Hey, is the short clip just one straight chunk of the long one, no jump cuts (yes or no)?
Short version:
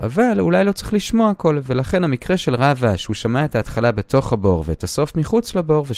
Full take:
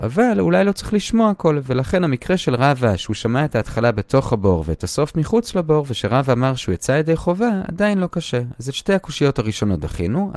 yes